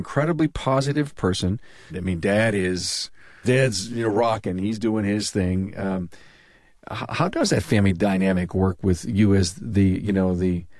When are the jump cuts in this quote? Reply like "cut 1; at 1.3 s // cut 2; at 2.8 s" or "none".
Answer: cut 1; at 1.9 s